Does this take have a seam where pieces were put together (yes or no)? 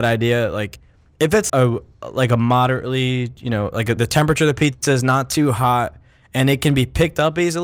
yes